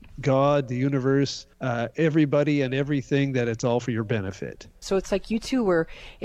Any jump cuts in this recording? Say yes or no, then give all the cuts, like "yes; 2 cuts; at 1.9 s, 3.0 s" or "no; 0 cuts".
yes; 2 cuts; at 1.5 s, 4.8 s